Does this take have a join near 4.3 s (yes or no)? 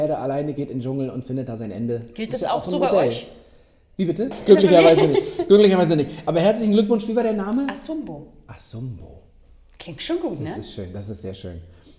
yes